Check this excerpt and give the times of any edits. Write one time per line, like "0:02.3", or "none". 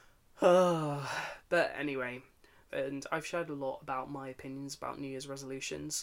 0:02.7